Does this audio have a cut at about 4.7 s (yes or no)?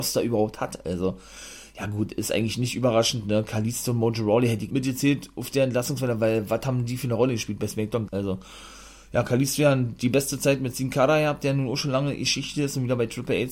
yes